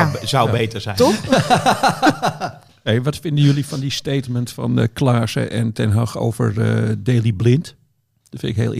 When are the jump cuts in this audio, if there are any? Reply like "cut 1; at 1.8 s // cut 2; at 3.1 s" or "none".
none